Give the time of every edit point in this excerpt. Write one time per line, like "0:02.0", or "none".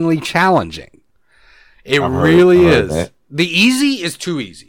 none